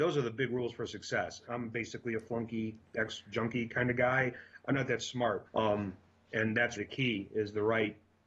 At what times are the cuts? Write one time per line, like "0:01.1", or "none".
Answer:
0:01.5
0:05.5
0:06.8